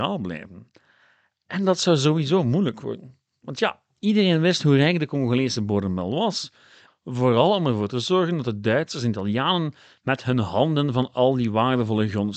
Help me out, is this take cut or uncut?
cut